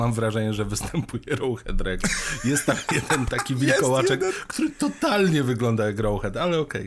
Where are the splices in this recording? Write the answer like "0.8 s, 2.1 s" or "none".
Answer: none